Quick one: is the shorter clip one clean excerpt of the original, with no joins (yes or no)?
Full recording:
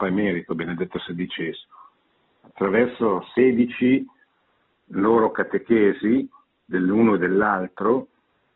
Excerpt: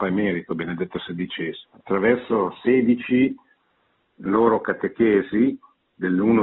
no